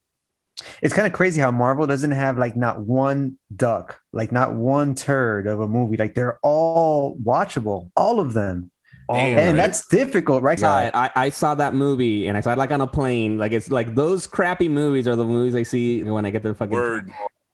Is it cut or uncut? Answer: cut